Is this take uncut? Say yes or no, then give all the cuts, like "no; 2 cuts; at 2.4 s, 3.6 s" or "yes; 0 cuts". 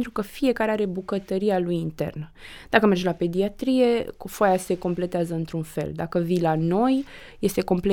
yes; 0 cuts